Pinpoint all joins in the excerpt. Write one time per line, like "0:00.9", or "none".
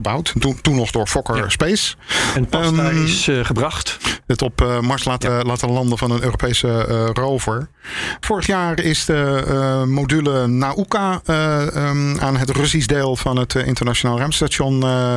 0:04.2
0:08.2